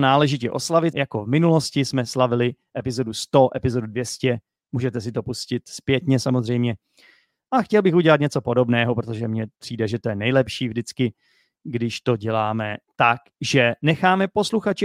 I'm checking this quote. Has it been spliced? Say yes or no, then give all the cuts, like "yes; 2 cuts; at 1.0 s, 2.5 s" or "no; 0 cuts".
yes; 1 cut; at 0.9 s